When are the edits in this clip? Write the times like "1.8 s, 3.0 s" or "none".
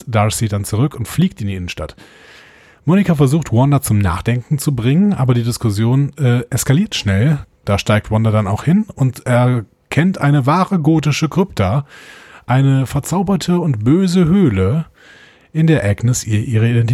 7.4 s